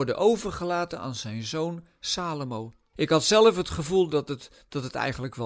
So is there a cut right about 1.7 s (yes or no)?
no